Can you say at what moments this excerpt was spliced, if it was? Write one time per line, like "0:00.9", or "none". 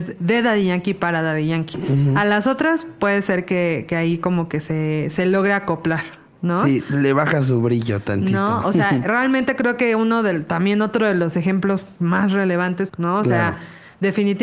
0:12.9